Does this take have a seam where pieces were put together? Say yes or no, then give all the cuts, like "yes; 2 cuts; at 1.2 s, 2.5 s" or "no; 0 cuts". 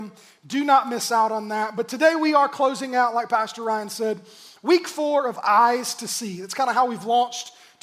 no; 0 cuts